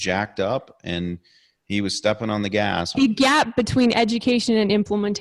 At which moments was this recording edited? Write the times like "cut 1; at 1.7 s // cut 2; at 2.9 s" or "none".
cut 1; at 2.9 s